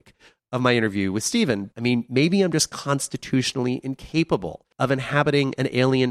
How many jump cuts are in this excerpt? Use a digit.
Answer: 2